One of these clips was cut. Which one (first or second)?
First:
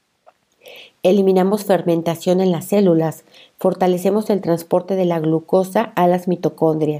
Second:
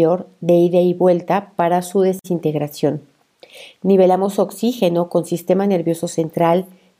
second